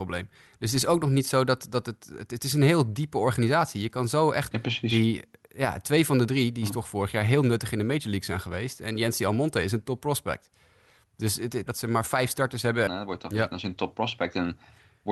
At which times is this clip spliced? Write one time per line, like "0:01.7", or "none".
0:04.5
0:11.7
0:12.9